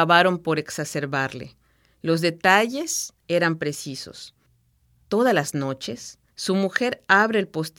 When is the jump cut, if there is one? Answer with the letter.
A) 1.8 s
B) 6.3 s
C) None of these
B